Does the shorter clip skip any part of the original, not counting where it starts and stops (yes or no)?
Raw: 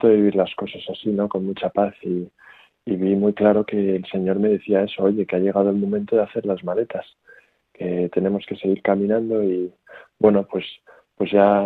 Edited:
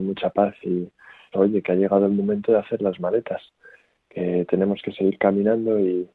yes